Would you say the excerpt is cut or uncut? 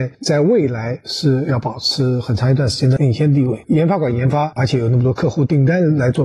cut